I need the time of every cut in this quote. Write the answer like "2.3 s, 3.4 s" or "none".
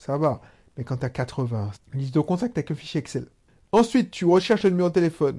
1.7 s